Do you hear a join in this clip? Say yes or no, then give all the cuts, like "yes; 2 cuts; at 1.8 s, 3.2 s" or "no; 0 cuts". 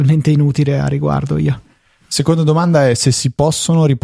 no; 0 cuts